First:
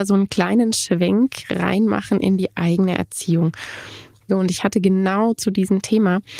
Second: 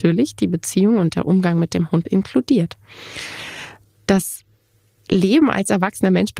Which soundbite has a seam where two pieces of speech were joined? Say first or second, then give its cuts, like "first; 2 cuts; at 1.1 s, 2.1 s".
first; 1 cut; at 4.3 s